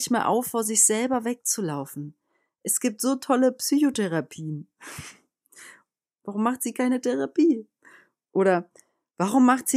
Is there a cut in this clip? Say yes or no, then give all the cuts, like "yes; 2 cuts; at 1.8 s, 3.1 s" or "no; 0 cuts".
yes; 1 cut; at 8.3 s